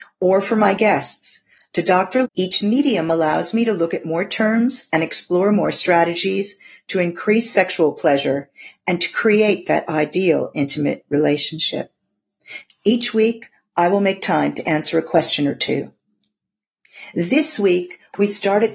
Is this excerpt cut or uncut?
cut